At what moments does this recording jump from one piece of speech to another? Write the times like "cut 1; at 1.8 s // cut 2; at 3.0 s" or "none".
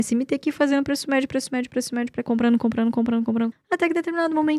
cut 1; at 2.3 s // cut 2; at 3.5 s